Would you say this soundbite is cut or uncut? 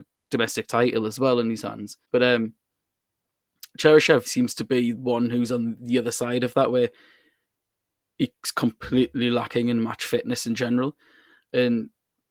cut